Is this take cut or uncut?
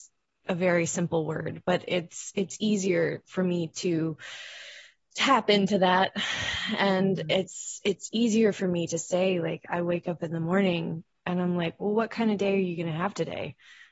uncut